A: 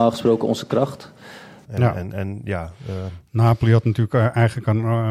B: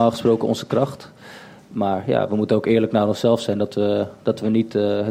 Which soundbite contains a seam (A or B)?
A